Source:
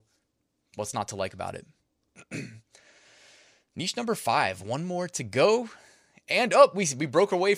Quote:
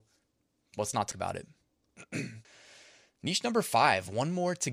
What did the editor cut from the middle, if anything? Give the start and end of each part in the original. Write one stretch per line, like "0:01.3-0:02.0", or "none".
0:01.1-0:01.3
0:02.6-0:03.0